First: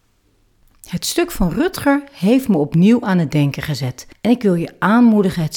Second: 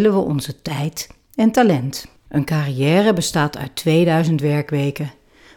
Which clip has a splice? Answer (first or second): second